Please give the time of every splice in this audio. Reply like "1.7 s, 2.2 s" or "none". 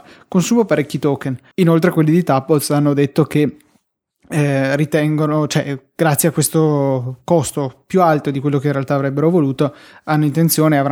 1.5 s